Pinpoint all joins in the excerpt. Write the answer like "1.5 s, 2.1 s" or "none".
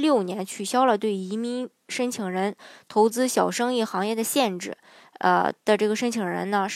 5.0 s